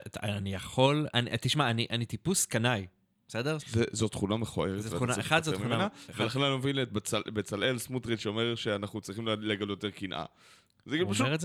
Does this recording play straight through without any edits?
no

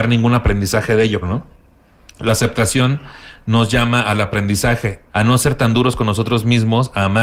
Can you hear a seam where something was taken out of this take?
yes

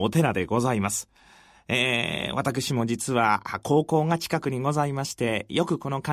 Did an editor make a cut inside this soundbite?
no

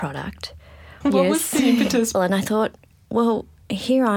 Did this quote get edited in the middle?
yes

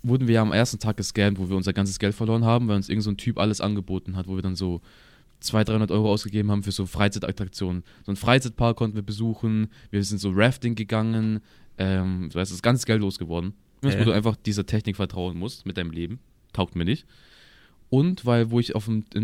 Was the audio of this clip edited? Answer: yes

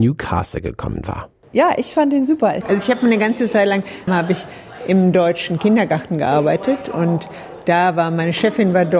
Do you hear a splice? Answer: yes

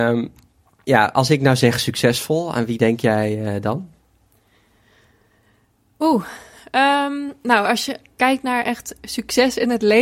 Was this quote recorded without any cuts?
yes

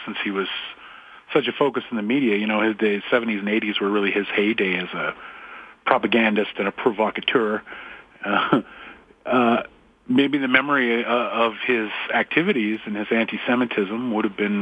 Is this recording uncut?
yes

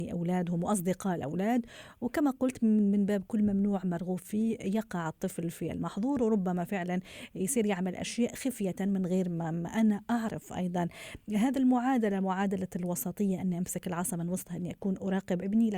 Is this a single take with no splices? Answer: yes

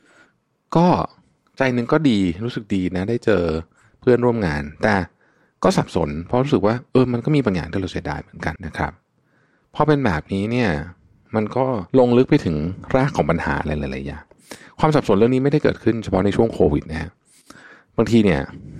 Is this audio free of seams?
no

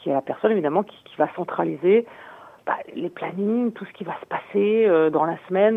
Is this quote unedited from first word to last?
yes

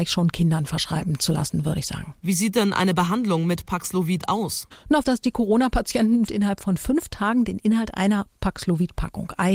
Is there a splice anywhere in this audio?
yes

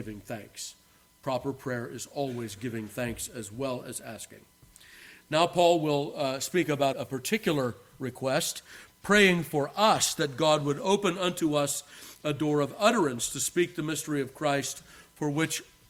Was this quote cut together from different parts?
yes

